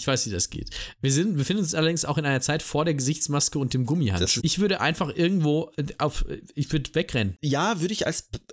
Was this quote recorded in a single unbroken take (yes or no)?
no